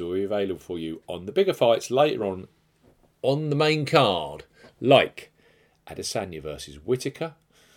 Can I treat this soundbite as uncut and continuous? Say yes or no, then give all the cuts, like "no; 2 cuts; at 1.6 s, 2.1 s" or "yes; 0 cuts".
yes; 0 cuts